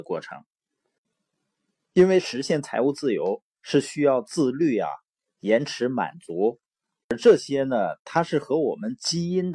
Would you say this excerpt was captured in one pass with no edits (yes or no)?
yes